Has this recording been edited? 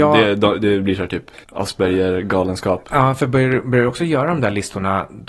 no; 0 cuts

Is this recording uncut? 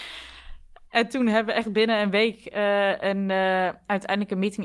yes; 0 cuts

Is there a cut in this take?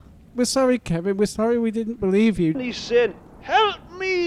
yes; 1 cut; at 2.5 s

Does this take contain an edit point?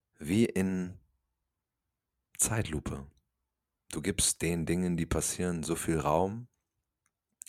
no; 0 cuts

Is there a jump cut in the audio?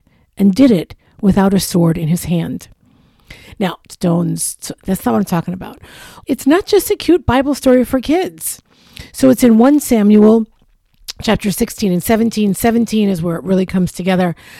yes; 2 cuts; at 3.8 s, 6.2 s

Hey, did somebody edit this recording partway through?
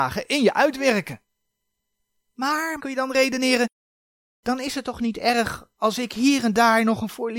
yes; 1 cut; at 2.8 s

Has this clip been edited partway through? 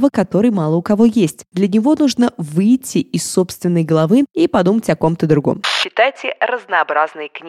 no; 0 cuts

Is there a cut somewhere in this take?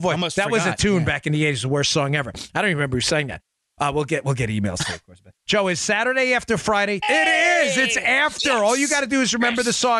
yes; 2 cuts; at 5.4 s, 7.0 s

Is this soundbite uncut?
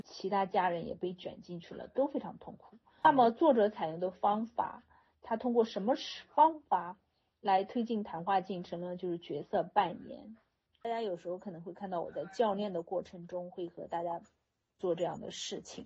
yes; 0 cuts

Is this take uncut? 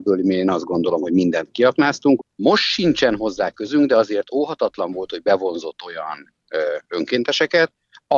no; 1 cut; at 2.2 s

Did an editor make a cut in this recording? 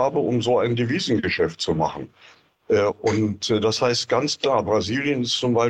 yes; 1 cut; at 2.5 s

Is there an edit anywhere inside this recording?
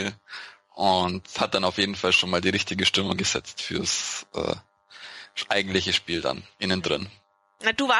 no; 0 cuts

